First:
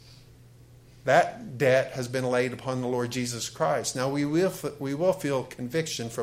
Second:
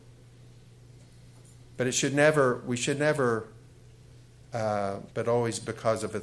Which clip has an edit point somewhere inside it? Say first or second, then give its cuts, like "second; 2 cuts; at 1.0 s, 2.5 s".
second; 1 cut; at 5.1 s